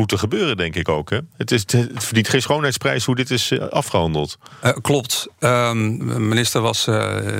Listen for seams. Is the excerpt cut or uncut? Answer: cut